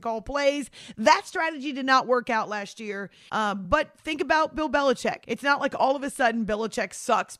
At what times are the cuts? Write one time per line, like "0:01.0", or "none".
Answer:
0:03.3
0:05.2